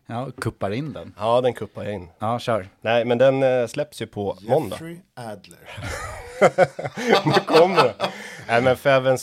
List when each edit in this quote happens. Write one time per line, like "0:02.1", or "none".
none